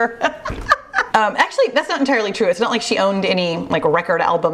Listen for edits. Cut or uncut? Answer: cut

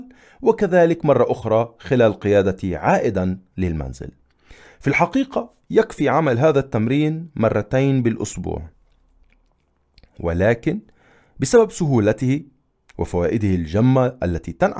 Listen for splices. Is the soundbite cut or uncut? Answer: uncut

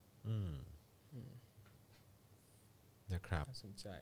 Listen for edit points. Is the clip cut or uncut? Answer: uncut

